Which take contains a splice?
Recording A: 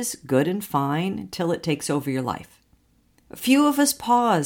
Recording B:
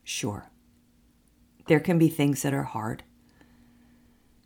A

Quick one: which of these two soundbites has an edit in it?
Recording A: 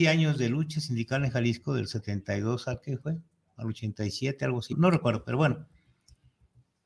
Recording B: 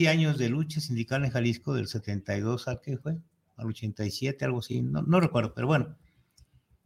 A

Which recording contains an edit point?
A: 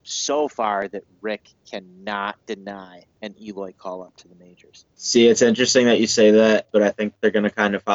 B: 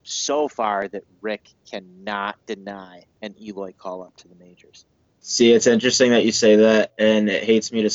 A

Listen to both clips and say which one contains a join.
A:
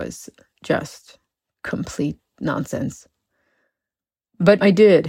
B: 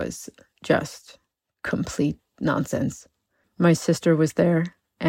B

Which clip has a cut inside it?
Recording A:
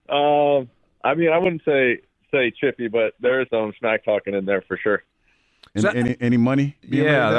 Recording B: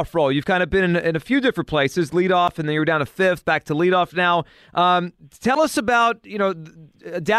A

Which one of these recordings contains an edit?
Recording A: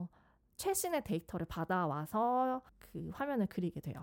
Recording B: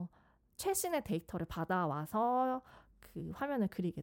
A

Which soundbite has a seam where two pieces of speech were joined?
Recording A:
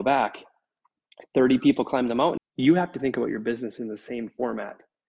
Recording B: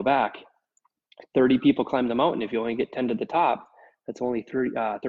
A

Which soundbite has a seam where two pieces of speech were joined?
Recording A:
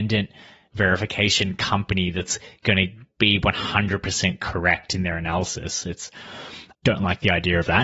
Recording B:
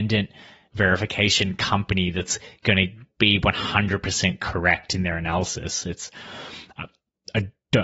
A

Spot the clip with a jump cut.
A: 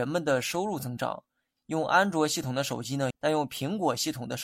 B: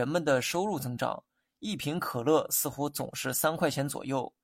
A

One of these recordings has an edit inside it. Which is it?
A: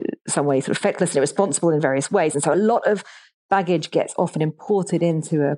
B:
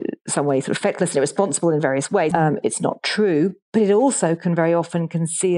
B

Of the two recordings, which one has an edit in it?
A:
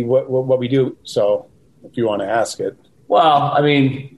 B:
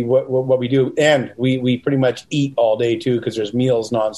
A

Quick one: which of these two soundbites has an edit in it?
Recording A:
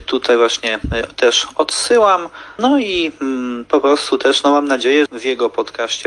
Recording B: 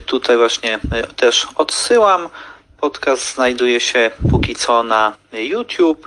A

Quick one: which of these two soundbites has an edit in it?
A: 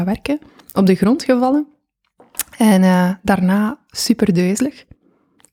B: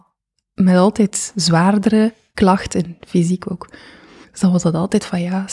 B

